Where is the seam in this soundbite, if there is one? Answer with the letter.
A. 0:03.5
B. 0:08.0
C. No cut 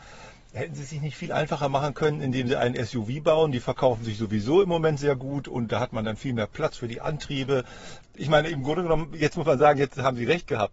B